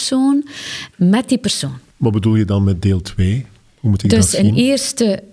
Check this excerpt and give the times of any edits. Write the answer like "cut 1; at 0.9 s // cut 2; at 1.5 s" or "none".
cut 1; at 0.9 s